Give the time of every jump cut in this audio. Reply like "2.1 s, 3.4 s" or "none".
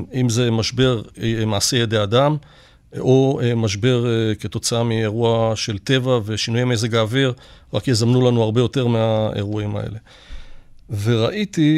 none